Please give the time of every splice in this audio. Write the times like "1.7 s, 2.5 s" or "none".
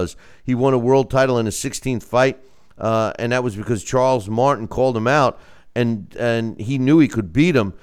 none

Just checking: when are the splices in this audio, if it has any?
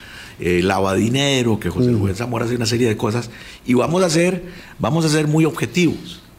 none

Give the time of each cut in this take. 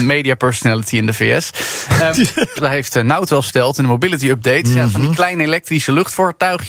2.6 s

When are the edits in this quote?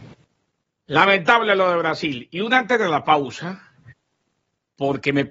none

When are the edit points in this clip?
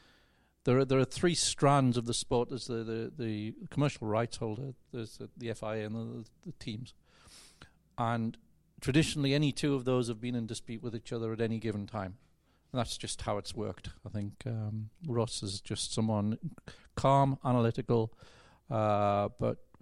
14.0 s

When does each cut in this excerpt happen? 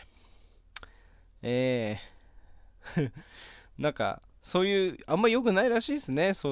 none

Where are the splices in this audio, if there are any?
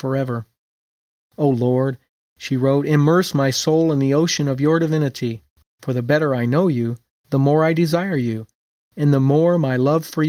5.6 s

